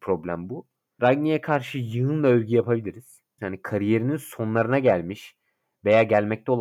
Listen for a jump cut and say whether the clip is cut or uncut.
cut